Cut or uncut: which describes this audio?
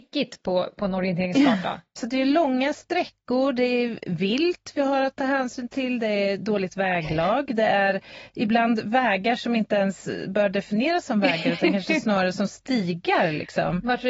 cut